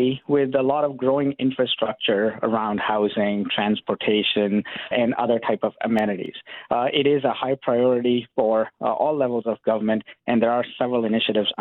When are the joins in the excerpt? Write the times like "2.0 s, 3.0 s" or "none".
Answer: 4.9 s